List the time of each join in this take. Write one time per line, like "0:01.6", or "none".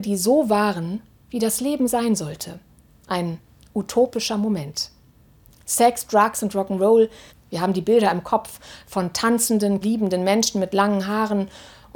0:07.3
0:09.8